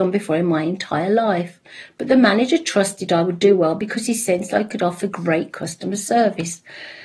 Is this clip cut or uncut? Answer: uncut